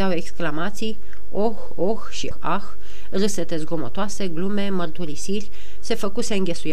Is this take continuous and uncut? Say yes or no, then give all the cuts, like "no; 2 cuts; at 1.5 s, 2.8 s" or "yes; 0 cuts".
no; 1 cut; at 2.3 s